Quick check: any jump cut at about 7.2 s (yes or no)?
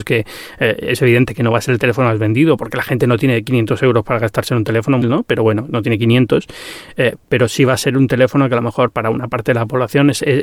yes